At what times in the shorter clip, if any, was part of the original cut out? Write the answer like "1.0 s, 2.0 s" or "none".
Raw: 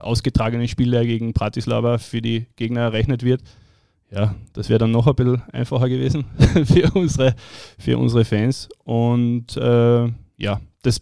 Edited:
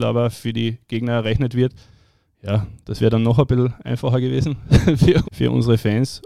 5.2 s